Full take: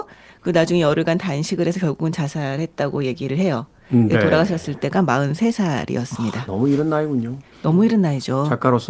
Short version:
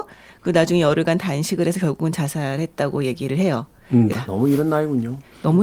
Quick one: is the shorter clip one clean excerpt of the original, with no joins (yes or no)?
no